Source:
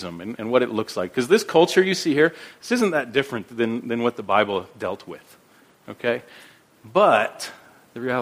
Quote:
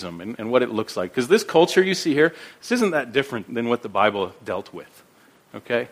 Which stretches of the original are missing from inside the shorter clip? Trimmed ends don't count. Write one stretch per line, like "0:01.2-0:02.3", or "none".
0:03.5-0:03.8